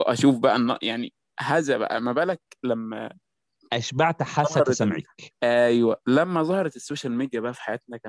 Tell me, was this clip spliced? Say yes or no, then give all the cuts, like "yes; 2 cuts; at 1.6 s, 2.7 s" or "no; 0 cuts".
yes; 1 cut; at 5.3 s